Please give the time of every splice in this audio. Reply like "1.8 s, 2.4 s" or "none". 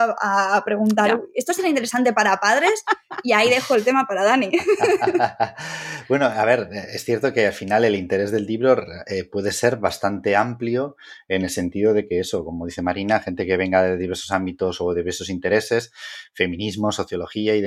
none